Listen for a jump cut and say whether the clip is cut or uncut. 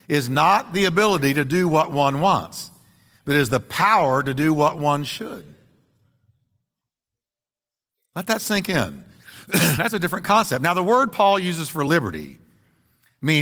uncut